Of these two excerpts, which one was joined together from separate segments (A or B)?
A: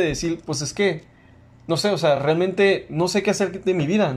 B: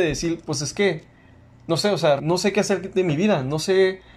B